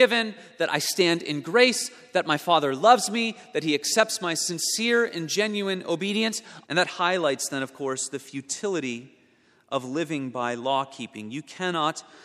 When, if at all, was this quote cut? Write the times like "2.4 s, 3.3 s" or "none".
6.6 s